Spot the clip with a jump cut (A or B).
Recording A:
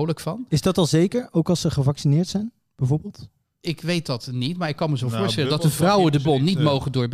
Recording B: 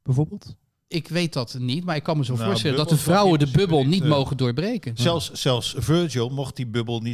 A